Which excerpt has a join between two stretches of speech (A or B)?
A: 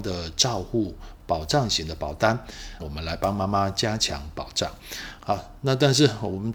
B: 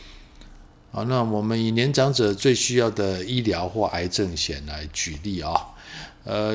A